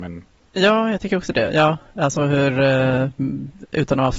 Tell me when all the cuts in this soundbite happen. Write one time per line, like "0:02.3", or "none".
none